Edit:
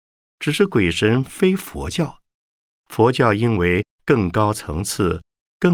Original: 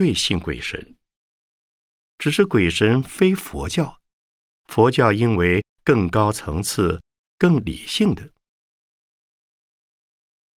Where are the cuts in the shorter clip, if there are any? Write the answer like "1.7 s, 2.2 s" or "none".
none